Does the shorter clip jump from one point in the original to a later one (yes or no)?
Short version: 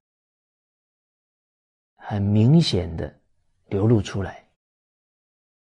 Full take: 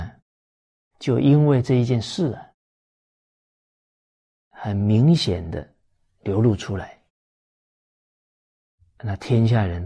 no